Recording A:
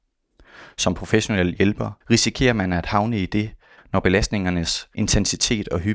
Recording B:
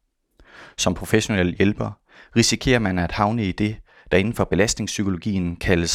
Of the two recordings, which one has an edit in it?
A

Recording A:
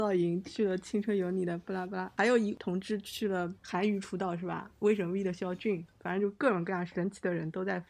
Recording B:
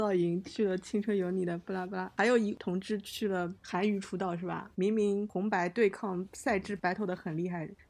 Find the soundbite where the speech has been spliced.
B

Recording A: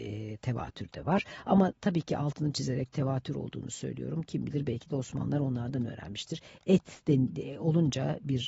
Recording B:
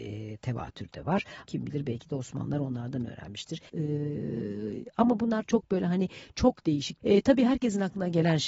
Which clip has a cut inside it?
B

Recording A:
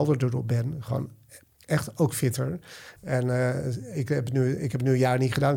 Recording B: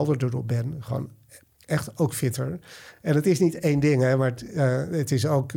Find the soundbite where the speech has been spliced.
A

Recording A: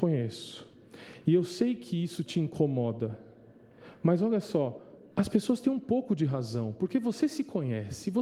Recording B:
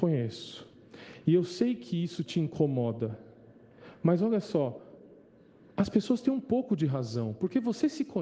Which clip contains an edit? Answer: A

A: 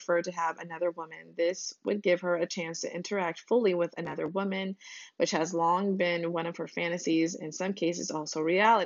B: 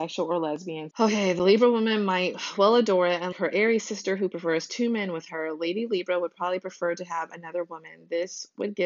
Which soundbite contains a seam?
B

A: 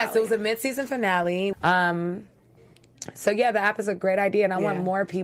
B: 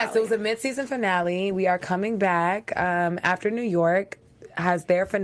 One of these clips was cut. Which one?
A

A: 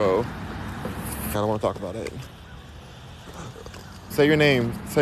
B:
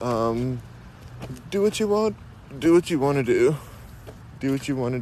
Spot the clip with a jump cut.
A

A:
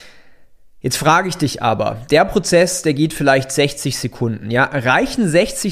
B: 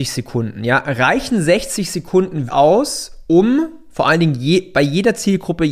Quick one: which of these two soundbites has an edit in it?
B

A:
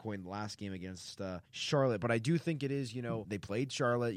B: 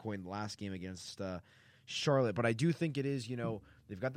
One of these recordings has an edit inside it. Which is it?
A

